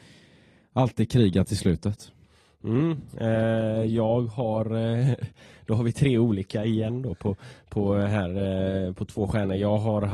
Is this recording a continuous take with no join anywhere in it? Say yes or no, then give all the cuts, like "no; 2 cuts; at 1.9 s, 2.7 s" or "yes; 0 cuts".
yes; 0 cuts